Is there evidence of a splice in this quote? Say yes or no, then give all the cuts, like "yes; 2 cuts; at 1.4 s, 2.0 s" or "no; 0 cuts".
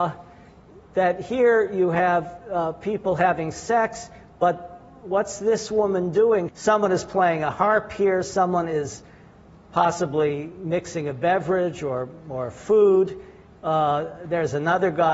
yes; 1 cut; at 6.5 s